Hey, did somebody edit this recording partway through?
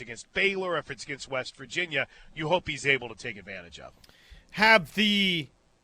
no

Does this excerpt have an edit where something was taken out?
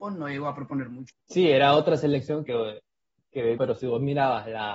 yes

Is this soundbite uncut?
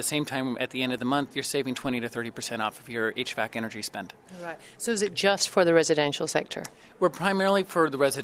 yes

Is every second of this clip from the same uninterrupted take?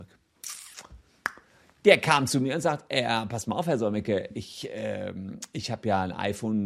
yes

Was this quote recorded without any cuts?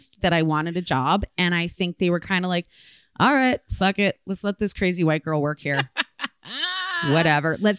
yes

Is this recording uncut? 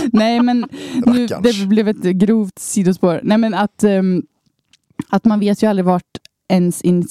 yes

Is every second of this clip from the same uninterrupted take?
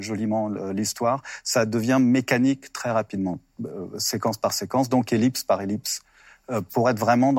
yes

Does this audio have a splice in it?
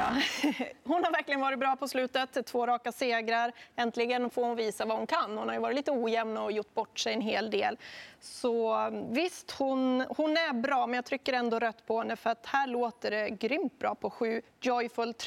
no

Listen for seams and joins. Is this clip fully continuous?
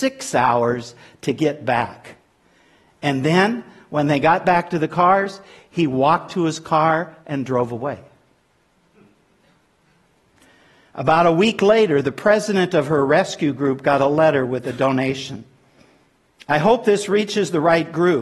yes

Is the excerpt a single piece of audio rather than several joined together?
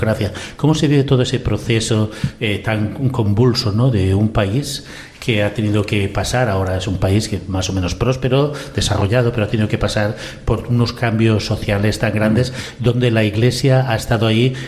yes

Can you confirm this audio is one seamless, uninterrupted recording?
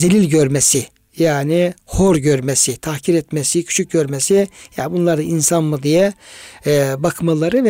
yes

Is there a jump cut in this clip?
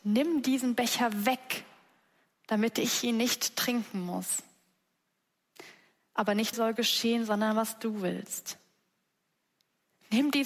yes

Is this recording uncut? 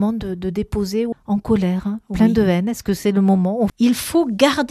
no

